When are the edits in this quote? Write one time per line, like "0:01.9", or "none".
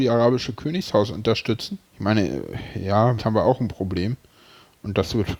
0:01.9
0:03.2